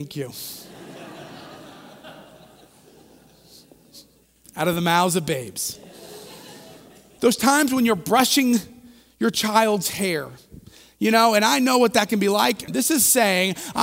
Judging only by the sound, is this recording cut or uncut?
cut